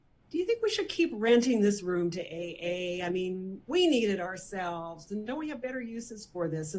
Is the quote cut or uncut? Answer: uncut